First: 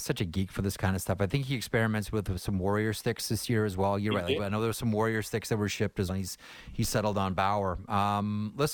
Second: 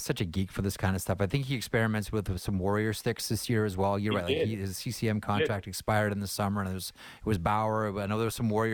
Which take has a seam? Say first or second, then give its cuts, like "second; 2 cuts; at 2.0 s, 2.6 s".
first; 2 cuts; at 4.4 s, 6.1 s